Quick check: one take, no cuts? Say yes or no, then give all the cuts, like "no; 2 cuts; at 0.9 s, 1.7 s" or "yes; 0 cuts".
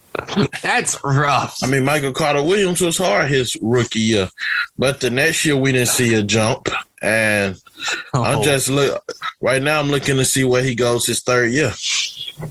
yes; 0 cuts